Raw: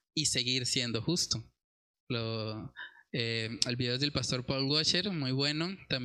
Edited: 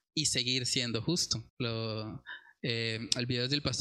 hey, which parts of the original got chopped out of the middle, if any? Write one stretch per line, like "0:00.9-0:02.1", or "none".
0:01.5-0:02.0